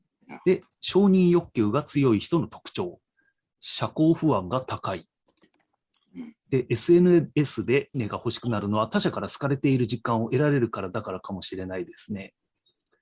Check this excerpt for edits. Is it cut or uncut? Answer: cut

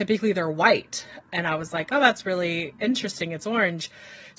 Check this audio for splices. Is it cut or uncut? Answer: uncut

